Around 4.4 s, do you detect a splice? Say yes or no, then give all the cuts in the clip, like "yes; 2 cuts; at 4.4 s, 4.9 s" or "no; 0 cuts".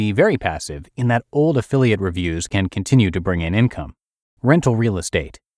yes; 1 cut; at 4.4 s